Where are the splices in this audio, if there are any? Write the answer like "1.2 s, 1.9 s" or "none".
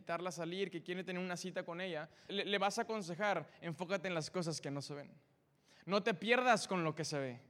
2.3 s

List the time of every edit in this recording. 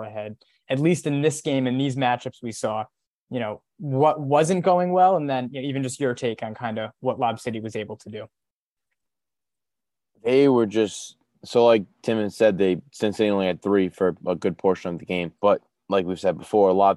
12.9 s, 15.3 s

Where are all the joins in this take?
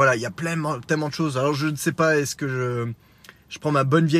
none

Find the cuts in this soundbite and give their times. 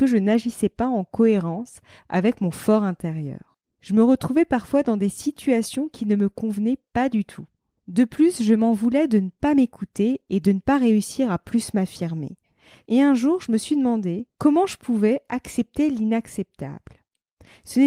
12.8 s, 14.3 s

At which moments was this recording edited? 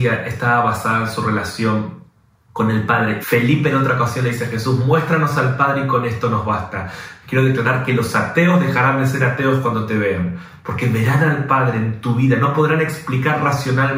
3.2 s, 7.2 s

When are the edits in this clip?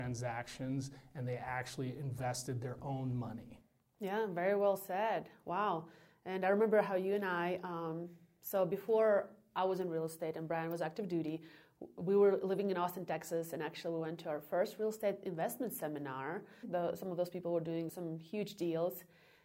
16.6 s, 17.9 s

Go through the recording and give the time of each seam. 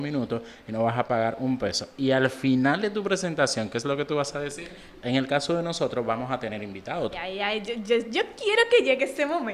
5.0 s, 7.1 s

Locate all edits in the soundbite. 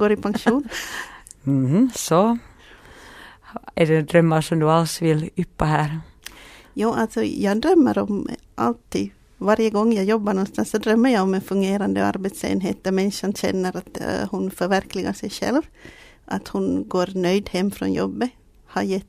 none

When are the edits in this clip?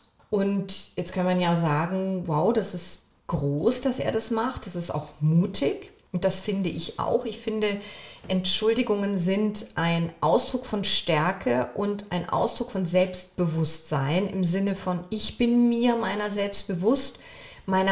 none

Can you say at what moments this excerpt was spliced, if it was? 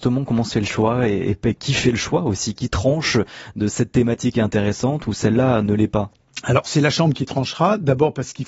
none

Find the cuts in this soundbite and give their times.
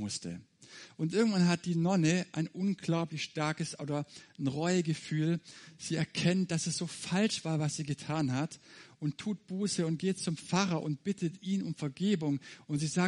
none

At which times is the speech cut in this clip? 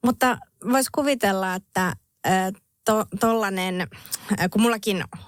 none

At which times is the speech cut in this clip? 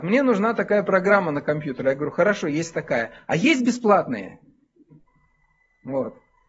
none

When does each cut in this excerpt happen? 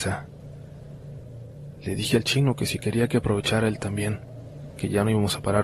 none

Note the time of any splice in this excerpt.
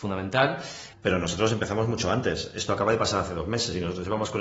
0.9 s

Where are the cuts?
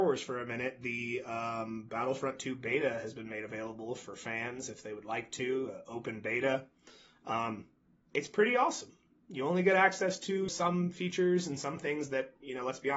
10.5 s

